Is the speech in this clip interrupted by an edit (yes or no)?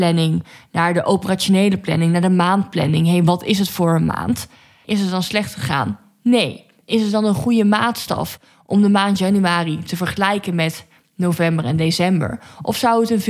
yes